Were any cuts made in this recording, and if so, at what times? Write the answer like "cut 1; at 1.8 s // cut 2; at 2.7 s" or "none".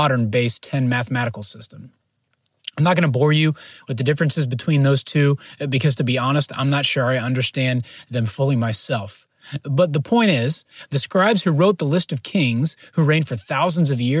none